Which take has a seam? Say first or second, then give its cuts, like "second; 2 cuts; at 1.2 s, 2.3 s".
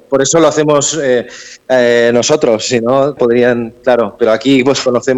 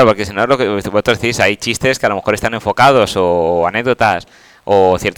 first; 1 cut; at 3.2 s